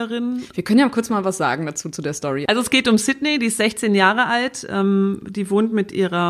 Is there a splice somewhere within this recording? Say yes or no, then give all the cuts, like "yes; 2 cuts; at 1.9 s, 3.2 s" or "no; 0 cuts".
no; 0 cuts